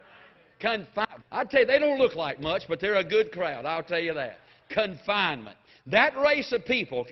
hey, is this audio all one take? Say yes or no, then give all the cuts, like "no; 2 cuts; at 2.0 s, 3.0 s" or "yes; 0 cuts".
no; 1 cut; at 1.2 s